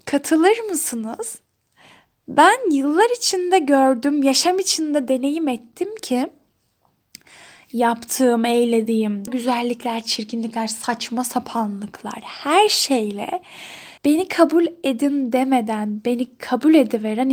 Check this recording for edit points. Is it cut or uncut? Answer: cut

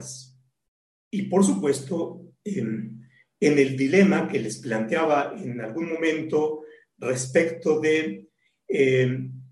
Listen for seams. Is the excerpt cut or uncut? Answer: uncut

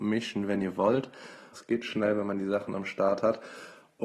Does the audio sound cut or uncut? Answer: cut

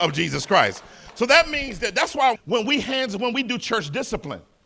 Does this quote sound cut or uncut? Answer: cut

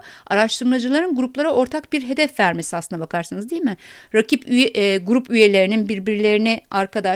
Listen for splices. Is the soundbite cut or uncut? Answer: uncut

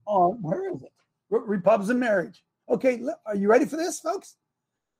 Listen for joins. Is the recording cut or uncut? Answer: cut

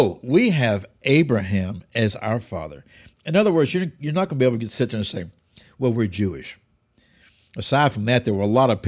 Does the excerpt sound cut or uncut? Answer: uncut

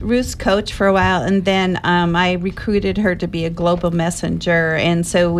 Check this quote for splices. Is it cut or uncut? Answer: uncut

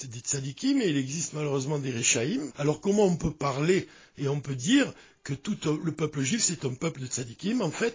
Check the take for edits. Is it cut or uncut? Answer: cut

